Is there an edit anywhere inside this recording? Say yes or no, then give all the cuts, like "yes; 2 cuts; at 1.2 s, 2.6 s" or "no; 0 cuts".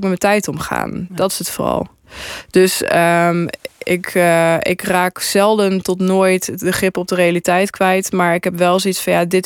no; 0 cuts